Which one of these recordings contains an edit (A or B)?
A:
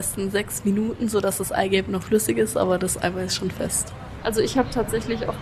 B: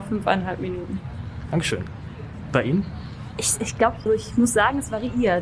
B